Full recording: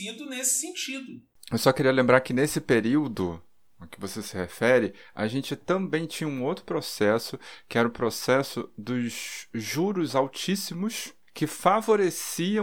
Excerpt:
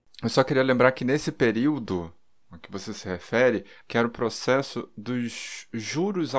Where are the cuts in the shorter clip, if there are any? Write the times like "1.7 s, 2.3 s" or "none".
3.8 s